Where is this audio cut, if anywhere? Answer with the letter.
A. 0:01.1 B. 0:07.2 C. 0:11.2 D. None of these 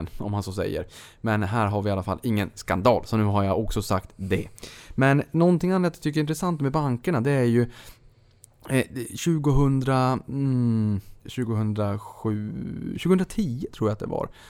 C